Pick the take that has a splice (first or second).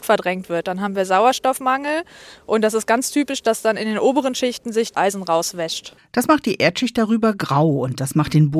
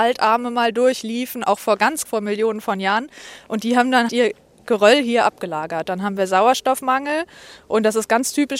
second